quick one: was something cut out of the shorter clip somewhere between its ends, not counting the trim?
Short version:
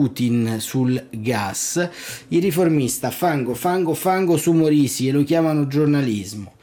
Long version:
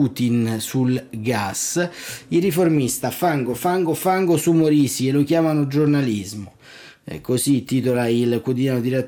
no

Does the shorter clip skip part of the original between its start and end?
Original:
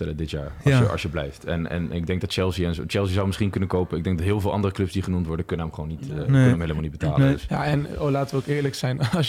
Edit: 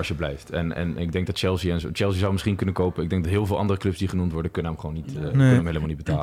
no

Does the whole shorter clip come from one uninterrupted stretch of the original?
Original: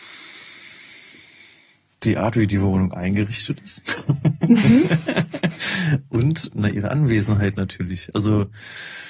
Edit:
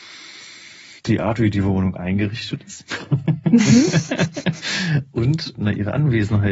no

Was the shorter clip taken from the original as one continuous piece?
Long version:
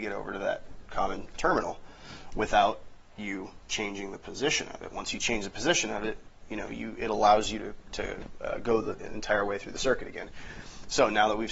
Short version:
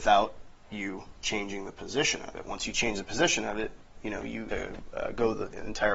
no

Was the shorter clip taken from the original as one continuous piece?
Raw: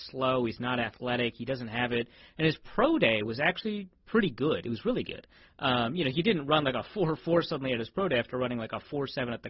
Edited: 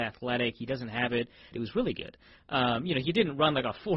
no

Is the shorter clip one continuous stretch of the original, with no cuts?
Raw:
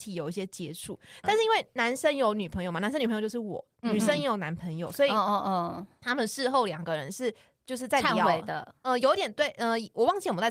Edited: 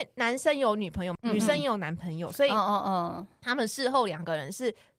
no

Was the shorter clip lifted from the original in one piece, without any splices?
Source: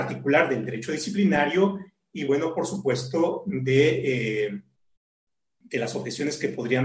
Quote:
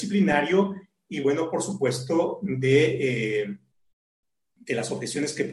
yes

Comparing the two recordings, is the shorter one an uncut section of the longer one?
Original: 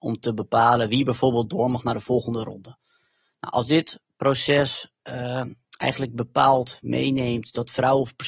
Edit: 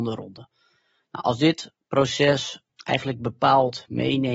no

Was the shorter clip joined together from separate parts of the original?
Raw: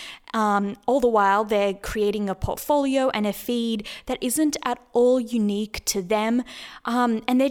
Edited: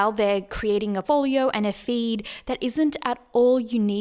yes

